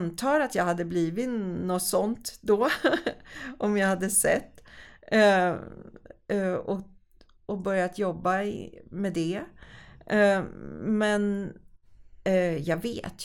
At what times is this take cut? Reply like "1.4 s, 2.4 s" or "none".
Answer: none